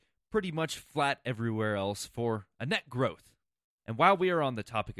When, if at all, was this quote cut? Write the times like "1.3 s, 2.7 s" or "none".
3.8 s